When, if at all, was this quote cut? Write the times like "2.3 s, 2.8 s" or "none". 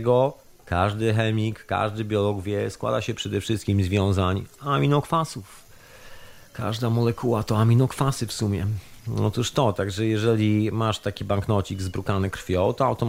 none